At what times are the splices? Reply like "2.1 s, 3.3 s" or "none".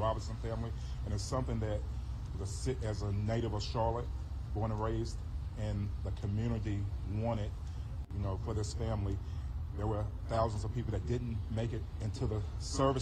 2.3 s